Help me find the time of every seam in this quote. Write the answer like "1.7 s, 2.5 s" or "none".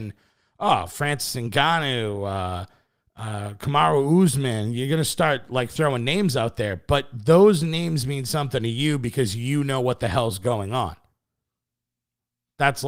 none